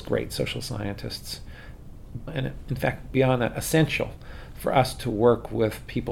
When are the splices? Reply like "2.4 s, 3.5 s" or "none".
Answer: 2.3 s